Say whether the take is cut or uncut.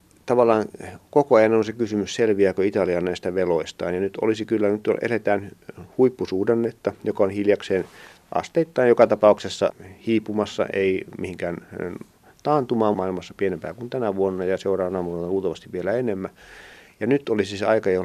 cut